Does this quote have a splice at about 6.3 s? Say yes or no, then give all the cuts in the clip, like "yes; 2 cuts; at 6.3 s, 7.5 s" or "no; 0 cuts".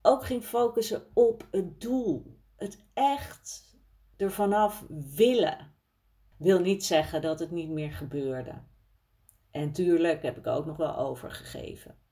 yes; 1 cut; at 6.3 s